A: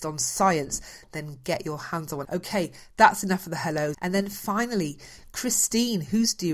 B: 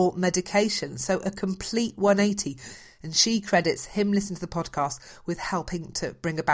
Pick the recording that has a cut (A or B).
A